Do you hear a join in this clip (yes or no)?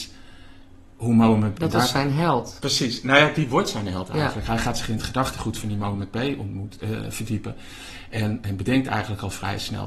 yes